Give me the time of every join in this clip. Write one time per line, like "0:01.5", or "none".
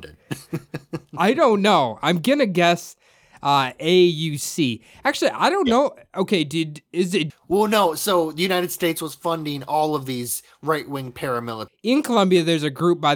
0:07.3
0:11.7

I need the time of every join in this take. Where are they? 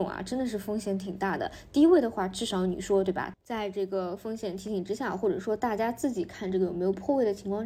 0:03.3

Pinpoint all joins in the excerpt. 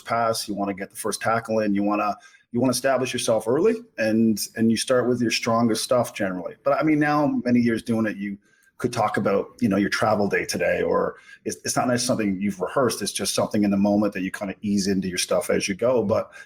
none

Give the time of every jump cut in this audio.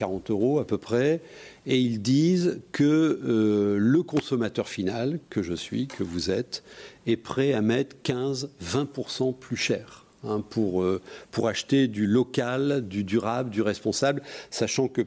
none

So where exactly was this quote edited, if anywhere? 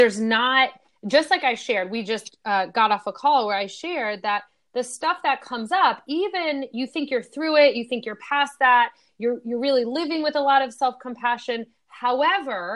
none

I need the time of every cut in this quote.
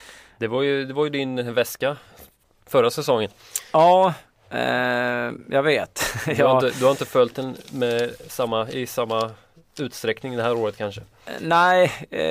none

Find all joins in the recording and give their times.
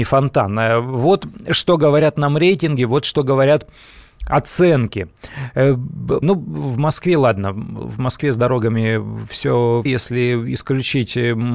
0:06.2
0:09.9

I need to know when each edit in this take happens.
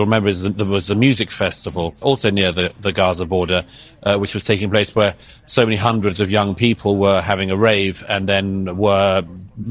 0:02.0

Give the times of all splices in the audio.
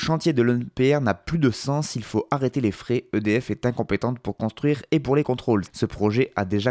0:05.6

